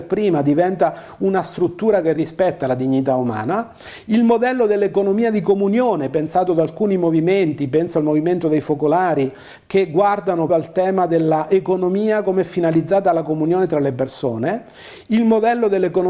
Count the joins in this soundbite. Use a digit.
1